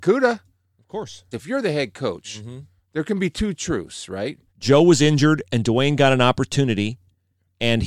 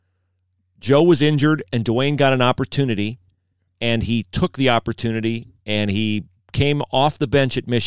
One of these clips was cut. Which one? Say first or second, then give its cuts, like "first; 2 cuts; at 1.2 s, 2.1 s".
first; 2 cuts; at 1.3 s, 4.5 s